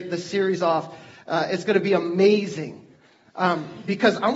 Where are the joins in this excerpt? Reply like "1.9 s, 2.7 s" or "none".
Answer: none